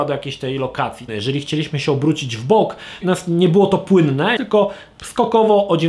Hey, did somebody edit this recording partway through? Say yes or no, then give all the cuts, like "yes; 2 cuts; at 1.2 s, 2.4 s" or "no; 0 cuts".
yes; 3 cuts; at 1.1 s, 3.0 s, 4.4 s